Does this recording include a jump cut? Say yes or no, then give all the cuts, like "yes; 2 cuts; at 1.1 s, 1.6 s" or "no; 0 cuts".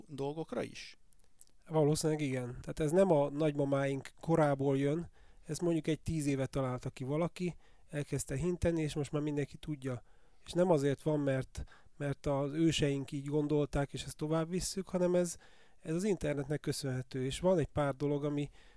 yes; 1 cut; at 2.6 s